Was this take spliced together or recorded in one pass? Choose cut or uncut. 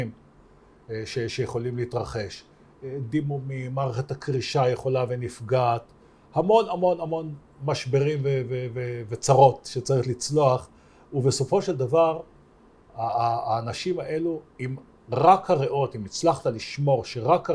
cut